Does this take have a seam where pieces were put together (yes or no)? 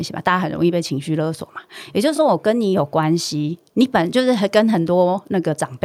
no